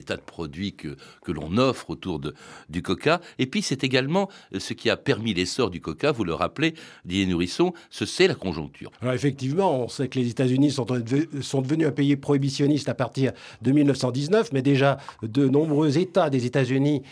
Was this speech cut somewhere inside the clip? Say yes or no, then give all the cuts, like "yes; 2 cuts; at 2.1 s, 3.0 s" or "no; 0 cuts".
yes; 1 cut; at 8.9 s